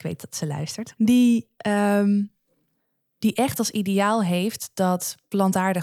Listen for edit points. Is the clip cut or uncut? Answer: cut